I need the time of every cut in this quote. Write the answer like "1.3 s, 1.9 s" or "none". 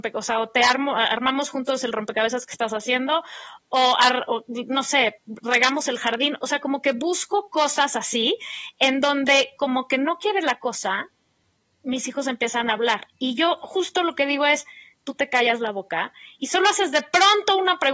none